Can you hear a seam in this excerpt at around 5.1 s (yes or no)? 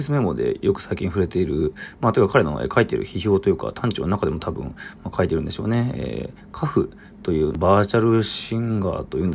no